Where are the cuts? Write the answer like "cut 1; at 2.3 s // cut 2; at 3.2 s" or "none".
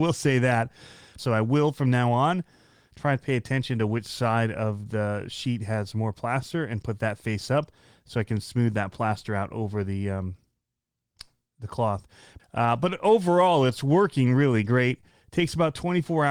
cut 1; at 1.2 s // cut 2; at 12.4 s